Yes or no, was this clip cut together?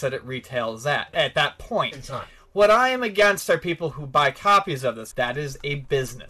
yes